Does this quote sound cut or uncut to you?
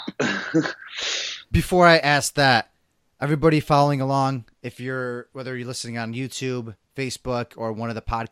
cut